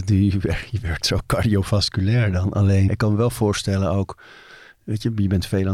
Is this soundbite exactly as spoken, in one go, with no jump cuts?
no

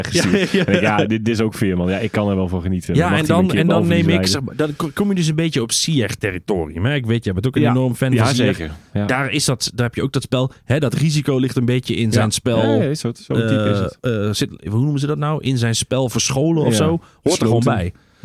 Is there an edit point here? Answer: no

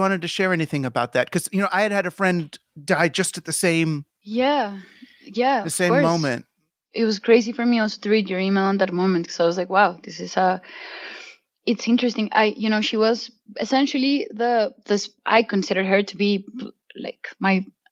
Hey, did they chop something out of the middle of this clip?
no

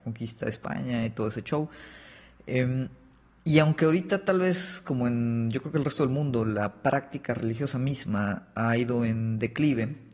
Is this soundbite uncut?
yes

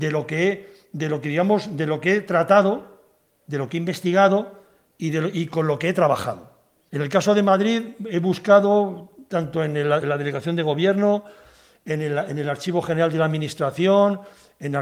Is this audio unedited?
no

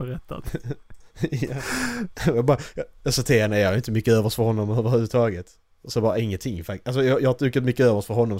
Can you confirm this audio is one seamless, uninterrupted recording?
yes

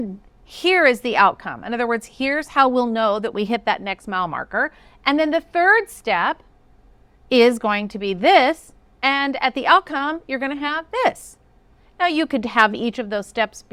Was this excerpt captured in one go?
yes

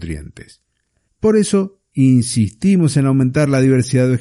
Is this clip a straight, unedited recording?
no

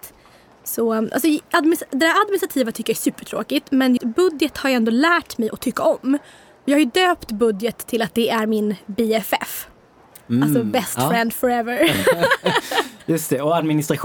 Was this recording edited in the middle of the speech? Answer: yes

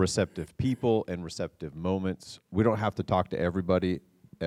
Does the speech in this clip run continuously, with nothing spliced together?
yes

